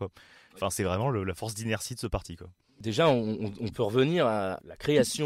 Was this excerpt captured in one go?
yes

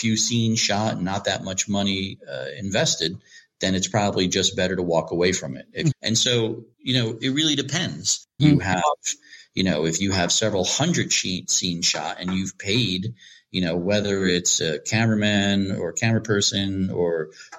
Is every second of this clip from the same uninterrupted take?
no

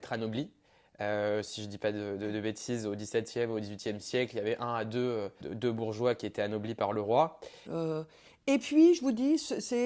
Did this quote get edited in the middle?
yes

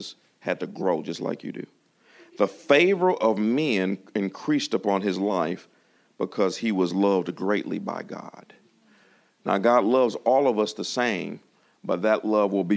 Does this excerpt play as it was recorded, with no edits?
yes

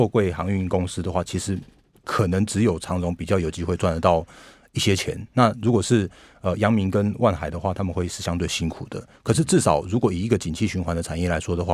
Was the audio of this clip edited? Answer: no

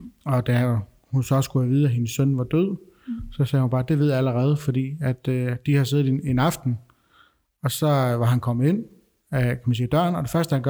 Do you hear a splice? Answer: no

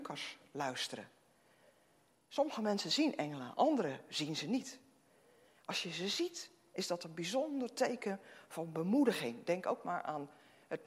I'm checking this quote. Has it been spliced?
no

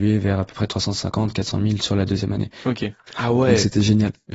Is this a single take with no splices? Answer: no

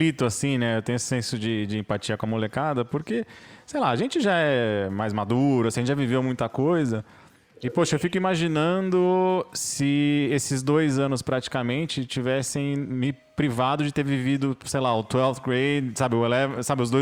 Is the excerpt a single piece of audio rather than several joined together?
yes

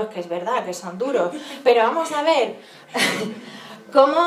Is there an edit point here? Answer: no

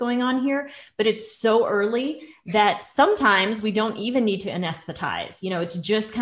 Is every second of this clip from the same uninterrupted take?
yes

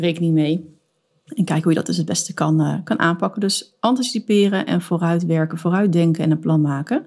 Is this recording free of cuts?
yes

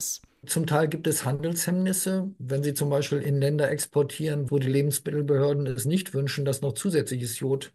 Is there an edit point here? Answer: yes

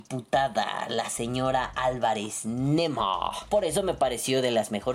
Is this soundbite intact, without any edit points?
yes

